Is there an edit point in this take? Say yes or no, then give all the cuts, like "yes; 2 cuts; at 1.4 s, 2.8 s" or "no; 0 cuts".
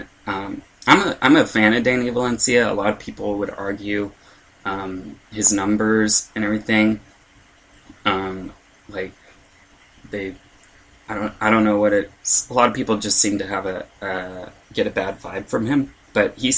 no; 0 cuts